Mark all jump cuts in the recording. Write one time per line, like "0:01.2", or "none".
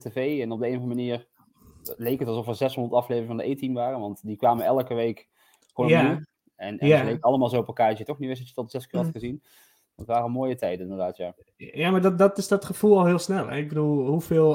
none

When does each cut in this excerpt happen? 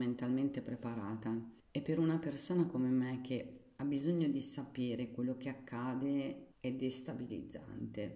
0:01.6
0:06.5

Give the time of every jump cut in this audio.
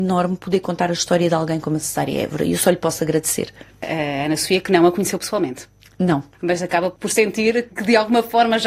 0:06.3
0:07.7

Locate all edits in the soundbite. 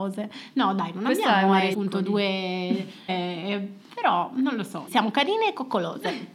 0:01.7
0:03.1
0:04.9

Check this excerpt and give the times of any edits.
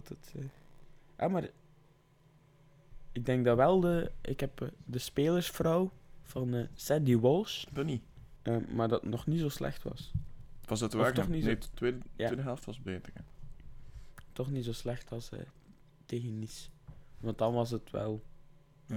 0:08.4

